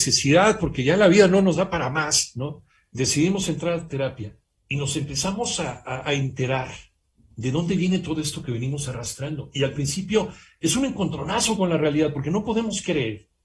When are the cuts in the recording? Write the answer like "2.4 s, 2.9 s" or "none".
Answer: none